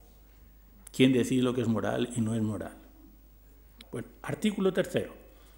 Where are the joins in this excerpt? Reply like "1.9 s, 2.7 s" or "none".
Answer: 3.8 s

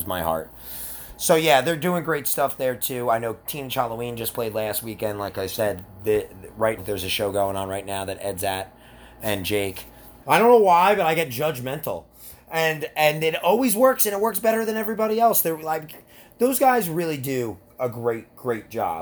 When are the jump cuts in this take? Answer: 6.8 s, 10.2 s

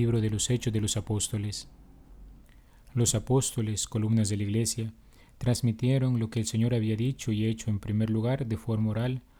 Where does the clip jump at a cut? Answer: none

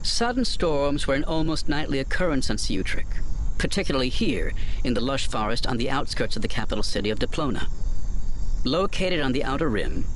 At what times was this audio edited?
8.6 s

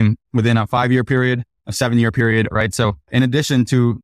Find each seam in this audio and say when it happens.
2.5 s

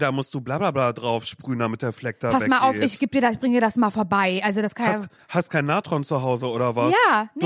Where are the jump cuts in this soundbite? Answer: none

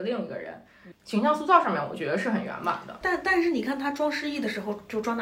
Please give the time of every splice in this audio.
0.9 s, 3.0 s

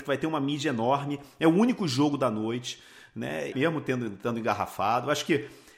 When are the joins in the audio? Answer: 3.5 s

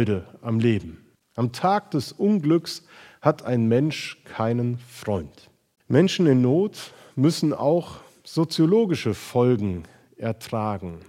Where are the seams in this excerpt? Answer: 1.2 s, 5.8 s

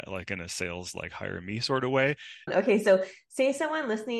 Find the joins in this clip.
2.5 s

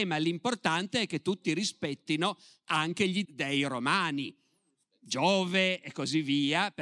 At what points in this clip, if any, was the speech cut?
3.2 s

